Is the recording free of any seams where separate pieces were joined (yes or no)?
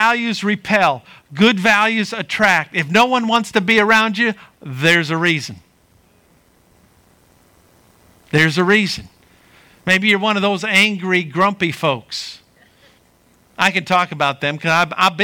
yes